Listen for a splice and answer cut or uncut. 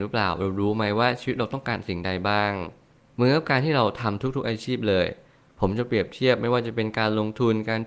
uncut